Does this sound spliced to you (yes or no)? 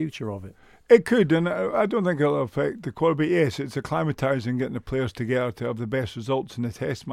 no